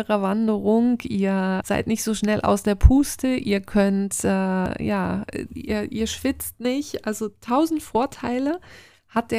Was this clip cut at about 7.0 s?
no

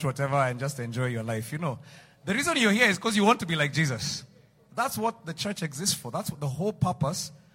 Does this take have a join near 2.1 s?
no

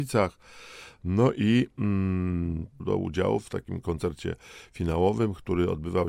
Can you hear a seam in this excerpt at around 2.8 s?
yes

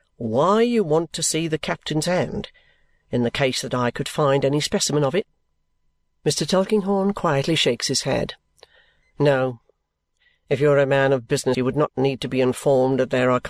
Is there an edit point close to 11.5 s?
yes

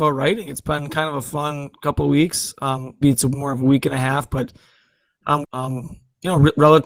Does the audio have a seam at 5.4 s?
yes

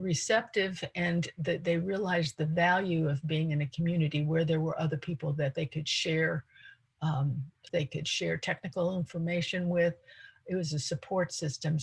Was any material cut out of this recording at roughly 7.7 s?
yes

